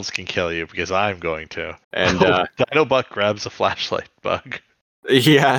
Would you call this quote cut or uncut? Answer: cut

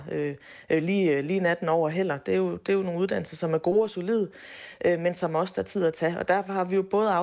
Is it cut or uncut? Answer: uncut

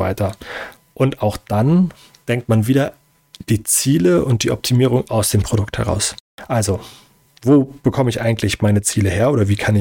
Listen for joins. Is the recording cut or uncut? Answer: uncut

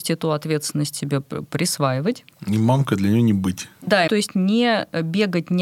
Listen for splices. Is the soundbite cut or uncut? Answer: cut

